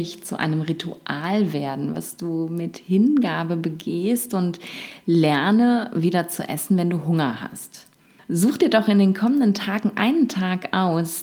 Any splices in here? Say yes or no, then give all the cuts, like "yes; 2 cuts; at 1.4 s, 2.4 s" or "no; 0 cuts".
yes; 1 cut; at 8.2 s